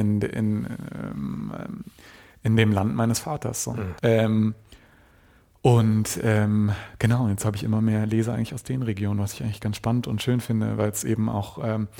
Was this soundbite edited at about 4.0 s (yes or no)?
yes